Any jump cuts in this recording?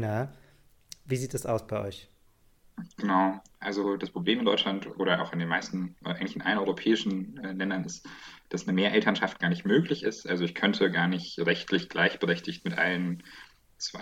no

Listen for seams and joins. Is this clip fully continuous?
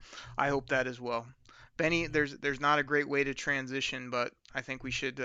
yes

